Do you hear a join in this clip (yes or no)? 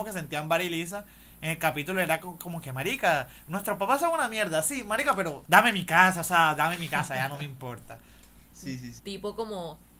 yes